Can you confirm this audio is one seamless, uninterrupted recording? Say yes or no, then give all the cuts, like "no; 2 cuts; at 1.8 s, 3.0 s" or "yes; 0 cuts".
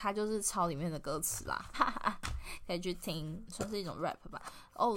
no; 2 cuts; at 1.7 s, 3.5 s